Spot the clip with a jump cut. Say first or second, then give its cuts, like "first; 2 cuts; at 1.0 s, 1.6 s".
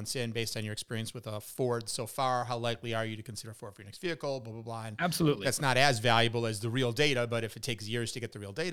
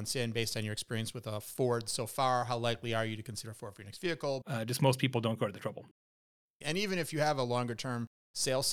second; 2 cuts; at 4.4 s, 6.6 s